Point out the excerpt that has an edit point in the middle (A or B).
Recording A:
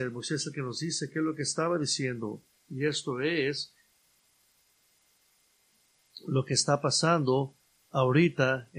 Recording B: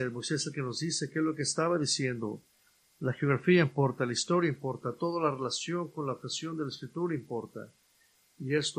A